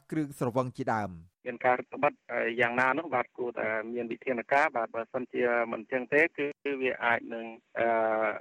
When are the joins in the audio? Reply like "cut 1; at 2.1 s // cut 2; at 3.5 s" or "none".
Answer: none